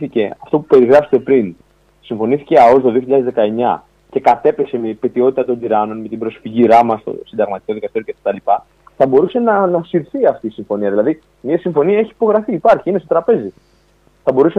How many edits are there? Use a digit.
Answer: 0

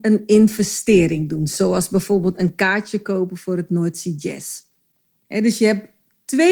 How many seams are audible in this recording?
1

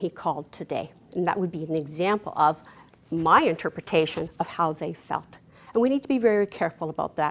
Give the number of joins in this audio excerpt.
0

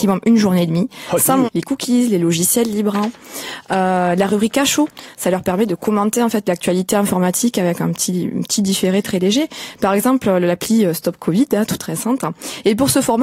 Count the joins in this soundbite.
1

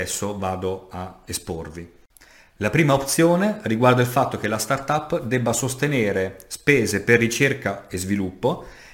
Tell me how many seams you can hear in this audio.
0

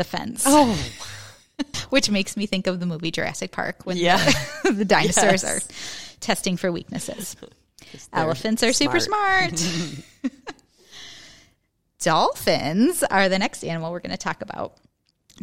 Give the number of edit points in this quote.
1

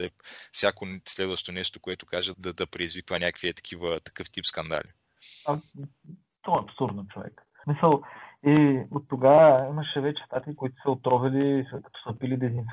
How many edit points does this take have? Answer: 3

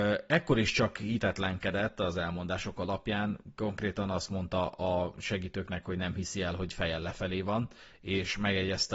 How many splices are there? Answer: 0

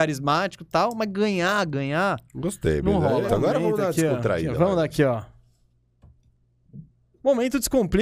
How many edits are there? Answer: 1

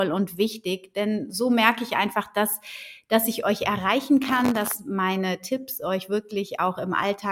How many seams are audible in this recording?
0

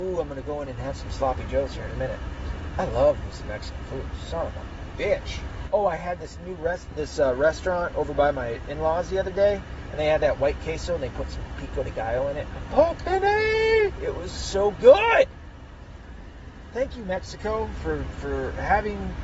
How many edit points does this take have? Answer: 1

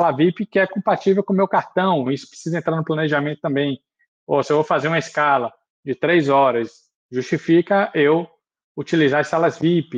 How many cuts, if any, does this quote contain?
1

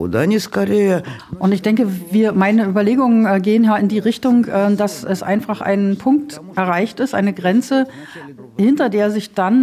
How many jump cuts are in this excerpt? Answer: 0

